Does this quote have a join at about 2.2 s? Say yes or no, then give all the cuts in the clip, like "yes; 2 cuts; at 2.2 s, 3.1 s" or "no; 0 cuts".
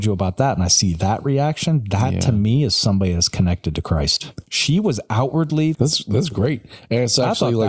no; 2 cuts; at 4.5 s, 5.7 s